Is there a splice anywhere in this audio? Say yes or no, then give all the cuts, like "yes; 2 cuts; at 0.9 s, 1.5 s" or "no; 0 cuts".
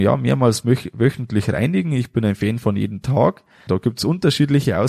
yes; 1 cut; at 3.7 s